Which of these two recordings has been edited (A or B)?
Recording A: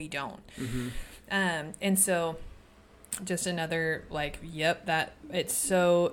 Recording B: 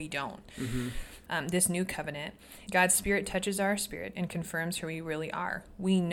B